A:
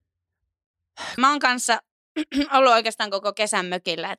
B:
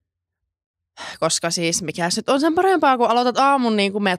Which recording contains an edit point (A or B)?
A